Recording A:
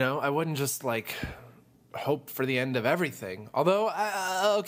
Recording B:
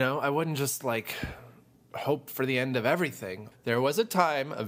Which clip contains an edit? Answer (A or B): B